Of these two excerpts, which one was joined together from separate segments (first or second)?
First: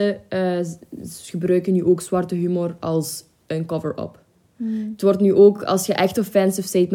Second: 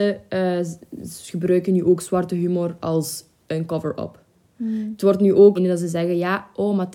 second